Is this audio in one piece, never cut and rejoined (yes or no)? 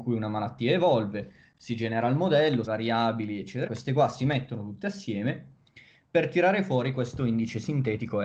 no